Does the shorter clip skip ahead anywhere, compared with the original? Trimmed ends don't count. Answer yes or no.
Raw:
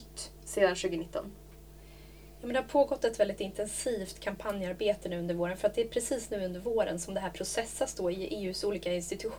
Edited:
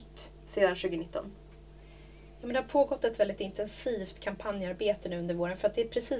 no